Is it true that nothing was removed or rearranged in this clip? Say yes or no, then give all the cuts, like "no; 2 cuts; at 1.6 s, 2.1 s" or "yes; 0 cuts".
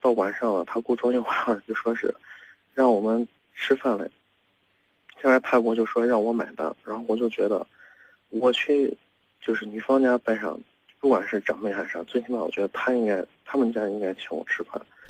yes; 0 cuts